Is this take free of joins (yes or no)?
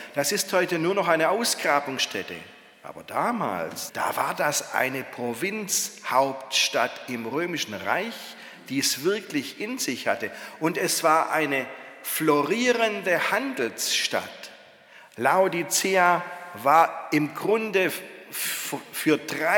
no